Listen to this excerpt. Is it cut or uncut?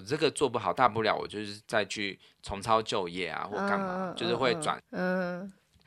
cut